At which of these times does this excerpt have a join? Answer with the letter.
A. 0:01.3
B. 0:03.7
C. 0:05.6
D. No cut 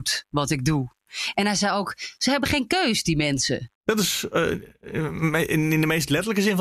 B